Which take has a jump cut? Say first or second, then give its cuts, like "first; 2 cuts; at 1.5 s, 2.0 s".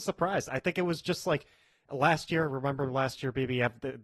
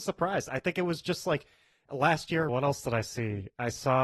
second; 1 cut; at 2.5 s